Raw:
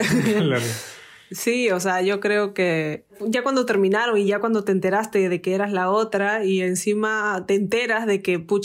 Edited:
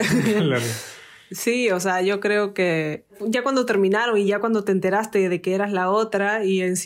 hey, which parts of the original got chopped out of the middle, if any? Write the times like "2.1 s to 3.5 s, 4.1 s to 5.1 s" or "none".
none